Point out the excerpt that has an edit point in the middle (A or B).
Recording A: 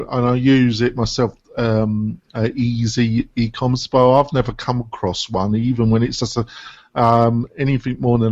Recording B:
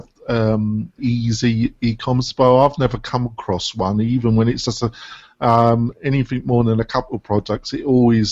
B